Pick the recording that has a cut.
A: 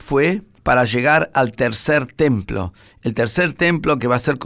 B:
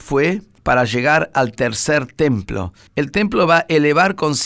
B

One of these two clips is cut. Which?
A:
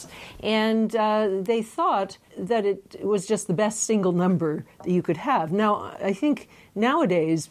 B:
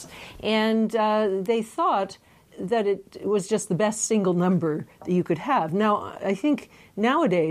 A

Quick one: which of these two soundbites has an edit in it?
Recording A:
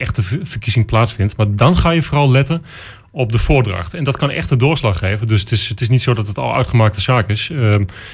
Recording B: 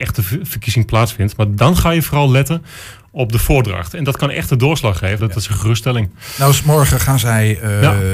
B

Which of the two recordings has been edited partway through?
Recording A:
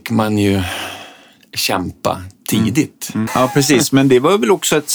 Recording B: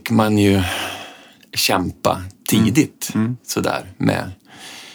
A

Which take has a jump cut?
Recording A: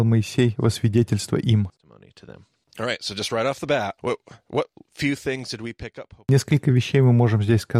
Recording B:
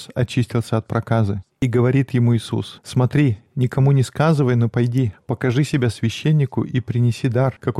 A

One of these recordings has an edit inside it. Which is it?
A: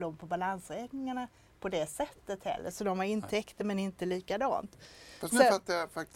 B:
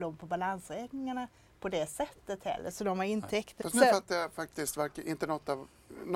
B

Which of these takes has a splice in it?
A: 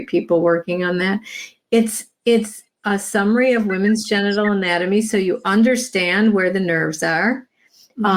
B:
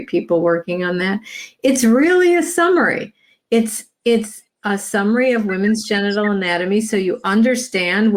A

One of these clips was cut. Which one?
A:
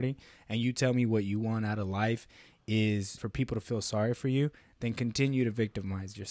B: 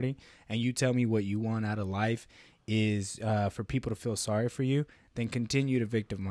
A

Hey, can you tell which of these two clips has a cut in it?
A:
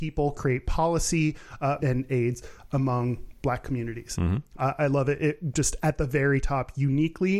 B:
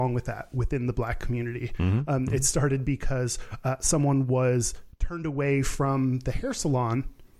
A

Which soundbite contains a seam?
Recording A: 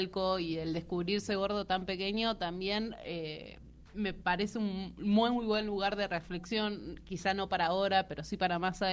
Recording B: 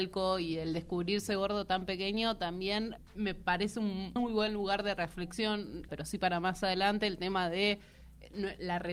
B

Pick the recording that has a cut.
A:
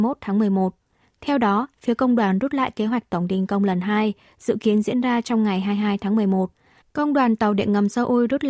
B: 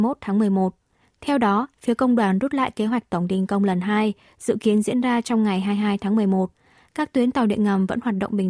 A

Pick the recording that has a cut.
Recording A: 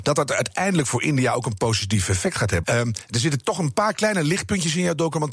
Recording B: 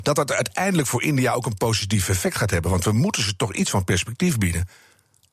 A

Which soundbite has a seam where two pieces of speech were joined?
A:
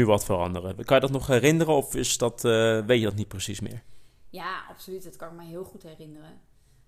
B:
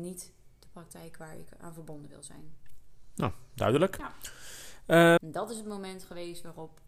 B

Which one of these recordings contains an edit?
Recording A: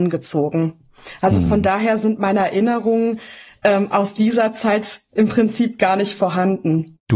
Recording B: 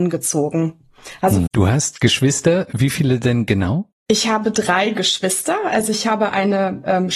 B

